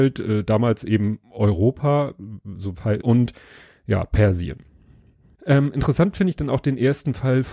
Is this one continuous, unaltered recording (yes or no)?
no